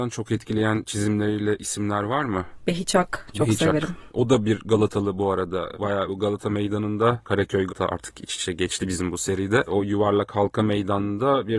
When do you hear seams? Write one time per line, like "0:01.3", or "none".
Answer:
0:07.7